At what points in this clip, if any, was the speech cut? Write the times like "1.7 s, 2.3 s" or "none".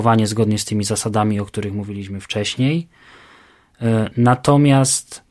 none